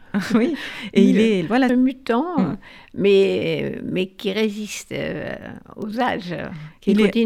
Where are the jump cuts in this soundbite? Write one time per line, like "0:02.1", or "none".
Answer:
0:01.7